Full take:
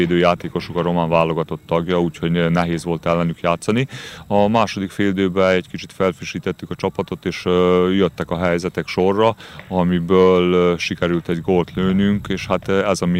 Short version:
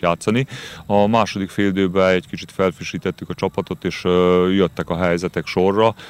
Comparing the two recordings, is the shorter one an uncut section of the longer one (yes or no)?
yes